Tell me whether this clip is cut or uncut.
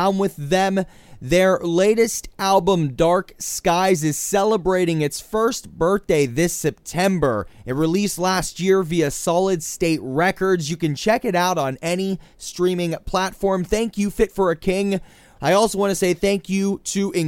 cut